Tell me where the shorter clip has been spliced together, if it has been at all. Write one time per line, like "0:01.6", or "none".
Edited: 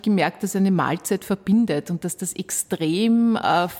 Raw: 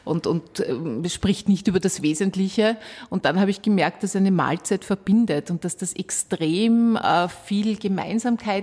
none